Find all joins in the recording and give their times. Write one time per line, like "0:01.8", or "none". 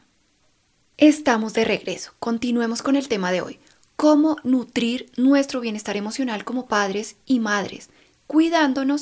0:00.9